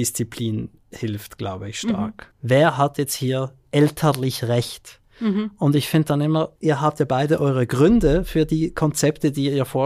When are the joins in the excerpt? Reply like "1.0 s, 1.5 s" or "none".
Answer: 2.3 s, 6.6 s